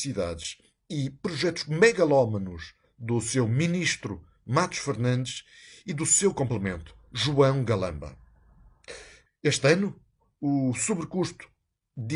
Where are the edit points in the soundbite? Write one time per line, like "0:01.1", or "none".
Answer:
0:09.3